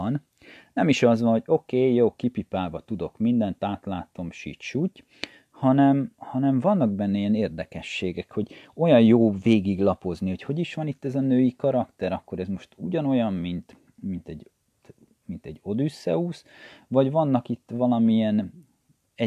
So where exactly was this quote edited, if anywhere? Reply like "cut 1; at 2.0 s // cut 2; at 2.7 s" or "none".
none

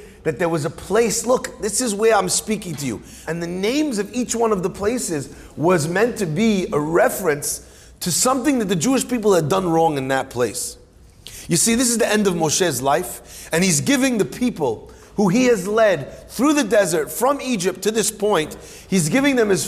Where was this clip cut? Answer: cut 1; at 3.3 s

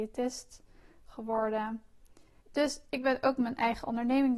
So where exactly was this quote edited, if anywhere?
cut 1; at 2.4 s

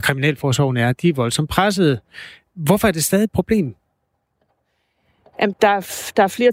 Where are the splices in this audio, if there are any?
cut 1; at 5.5 s

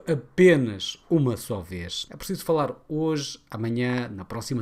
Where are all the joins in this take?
cut 1; at 2.1 s

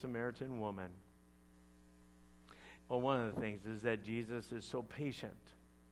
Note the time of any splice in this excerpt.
cut 1; at 2.8 s

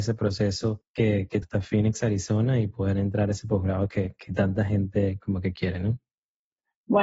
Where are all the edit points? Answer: cut 1; at 1.4 s

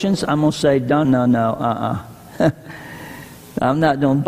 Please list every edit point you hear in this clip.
cut 1; at 1.0 s

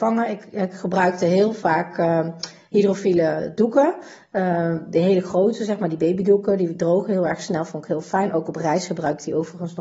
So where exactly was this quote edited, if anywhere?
none

